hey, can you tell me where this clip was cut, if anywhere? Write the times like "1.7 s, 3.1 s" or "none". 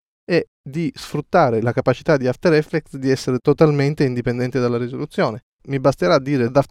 5.6 s

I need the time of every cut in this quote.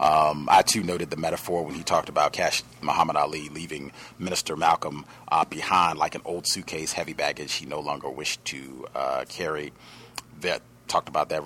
none

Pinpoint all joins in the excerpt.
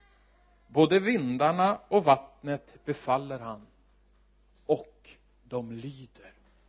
none

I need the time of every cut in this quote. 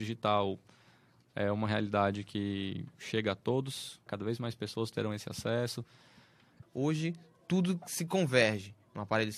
4.1 s, 6.6 s

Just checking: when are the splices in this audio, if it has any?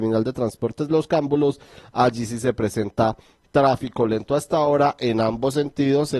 none

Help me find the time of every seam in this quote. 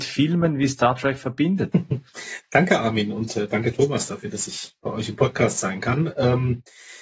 none

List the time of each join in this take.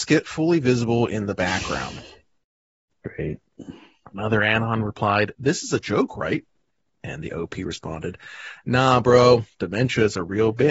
none

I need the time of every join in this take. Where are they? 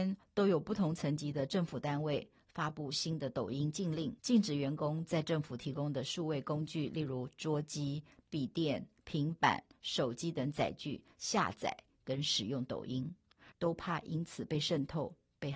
4.2 s, 13.5 s

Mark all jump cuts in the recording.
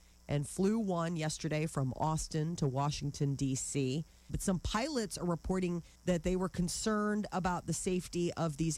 4.3 s, 6.0 s

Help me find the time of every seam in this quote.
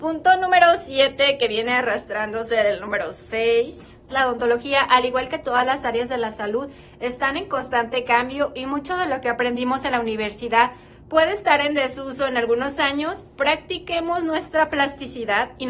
4.1 s

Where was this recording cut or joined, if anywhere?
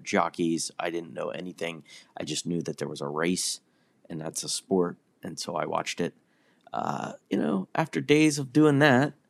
7.2 s

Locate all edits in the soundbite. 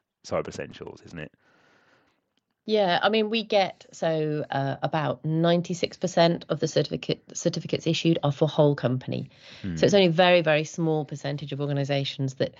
none

